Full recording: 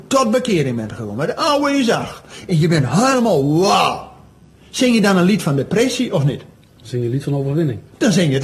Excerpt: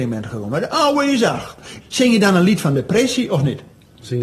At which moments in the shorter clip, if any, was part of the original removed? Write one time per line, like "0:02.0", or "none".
0:01.8